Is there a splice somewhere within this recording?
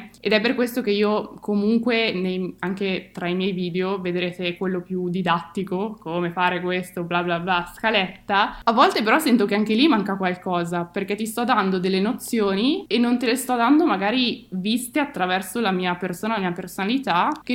no; 0 cuts

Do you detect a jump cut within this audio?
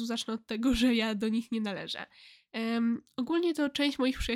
yes; 1 cut; at 2.5 s

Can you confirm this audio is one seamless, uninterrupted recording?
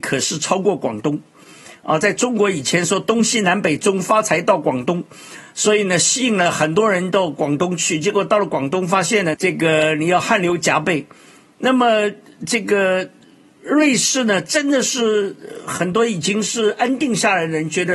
no; 1 cut; at 9.3 s

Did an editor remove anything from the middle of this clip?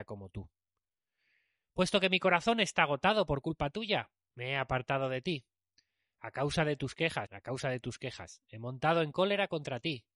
yes; 1 cut; at 7.3 s

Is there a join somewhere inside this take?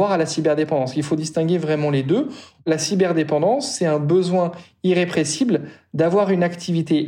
no; 0 cuts

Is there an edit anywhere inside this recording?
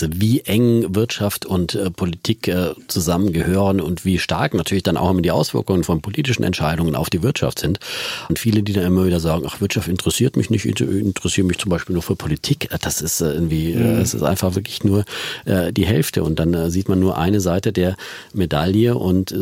yes; 1 cut; at 8.3 s

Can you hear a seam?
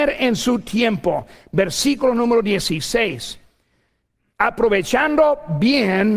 no; 0 cuts

